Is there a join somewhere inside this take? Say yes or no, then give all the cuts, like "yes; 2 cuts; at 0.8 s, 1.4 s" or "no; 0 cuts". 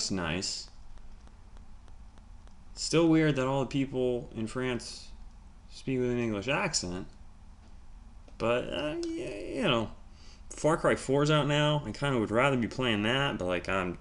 no; 0 cuts